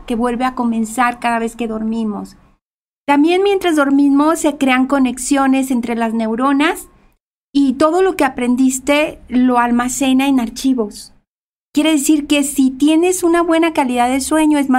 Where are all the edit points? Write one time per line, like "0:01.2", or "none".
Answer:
none